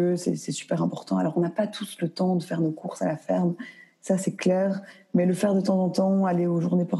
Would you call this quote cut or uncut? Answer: uncut